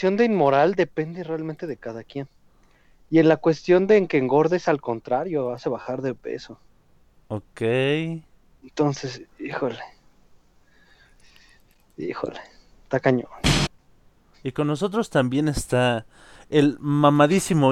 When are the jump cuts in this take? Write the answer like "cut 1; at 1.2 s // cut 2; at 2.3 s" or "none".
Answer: cut 1; at 14.3 s